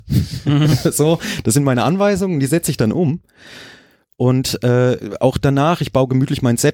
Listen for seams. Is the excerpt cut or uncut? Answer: uncut